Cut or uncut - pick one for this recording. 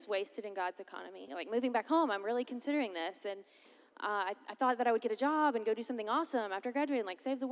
cut